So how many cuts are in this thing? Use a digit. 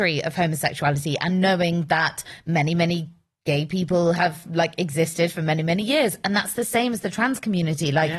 0